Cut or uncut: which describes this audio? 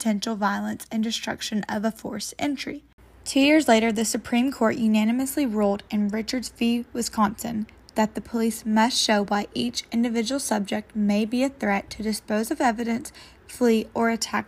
uncut